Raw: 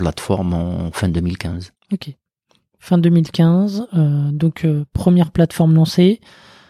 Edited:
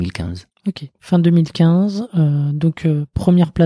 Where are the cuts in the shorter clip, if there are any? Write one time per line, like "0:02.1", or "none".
0:00.9